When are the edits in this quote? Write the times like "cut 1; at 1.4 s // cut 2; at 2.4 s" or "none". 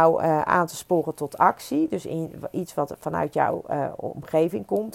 none

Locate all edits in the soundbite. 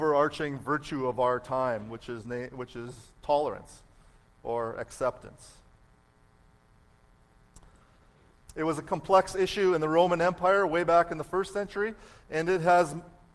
cut 1; at 8.3 s

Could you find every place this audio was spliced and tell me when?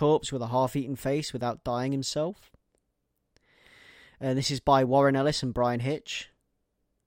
none

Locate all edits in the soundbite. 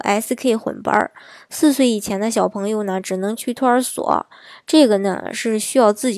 none

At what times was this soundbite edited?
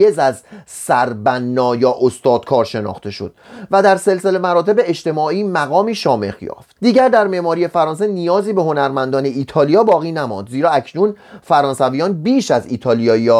cut 1; at 6.8 s

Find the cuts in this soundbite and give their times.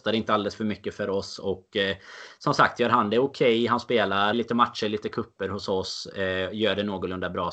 cut 1; at 4.3 s

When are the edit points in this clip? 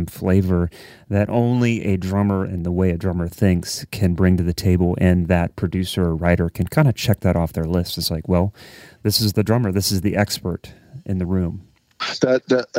none

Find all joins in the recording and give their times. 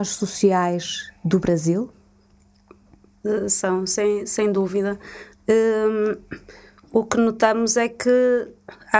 cut 1; at 5.3 s

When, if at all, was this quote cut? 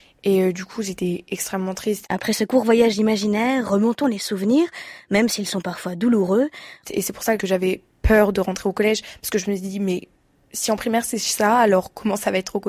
cut 1; at 2.0 s // cut 2; at 6.8 s

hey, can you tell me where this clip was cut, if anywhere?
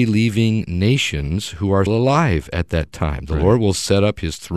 cut 1; at 1.9 s

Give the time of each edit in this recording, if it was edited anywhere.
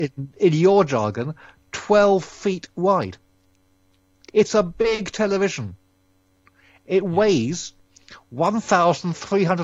none

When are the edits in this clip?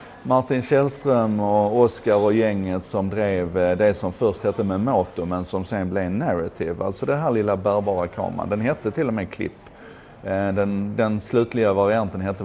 none

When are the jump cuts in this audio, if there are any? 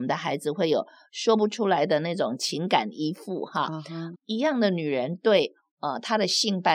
cut 1; at 4.1 s

